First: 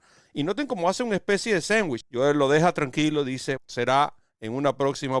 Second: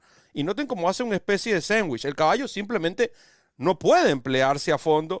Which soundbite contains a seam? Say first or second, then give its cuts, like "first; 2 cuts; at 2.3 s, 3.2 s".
first; 2 cuts; at 2.0 s, 3.6 s